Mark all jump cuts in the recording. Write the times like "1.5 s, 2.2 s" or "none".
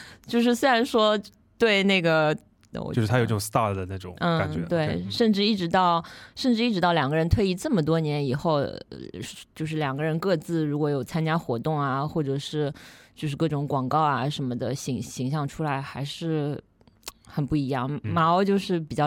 2.7 s